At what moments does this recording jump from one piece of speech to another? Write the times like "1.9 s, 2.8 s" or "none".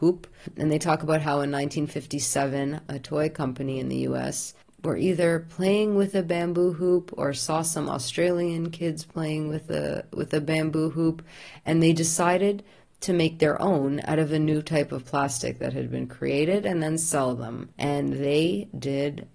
2.9 s, 17.7 s